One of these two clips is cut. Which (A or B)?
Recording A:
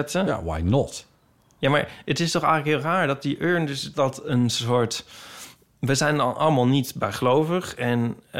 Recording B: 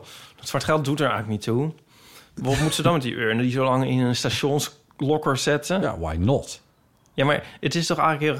A